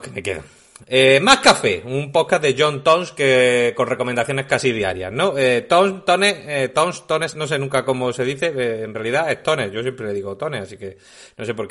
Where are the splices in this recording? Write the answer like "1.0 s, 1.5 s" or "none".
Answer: none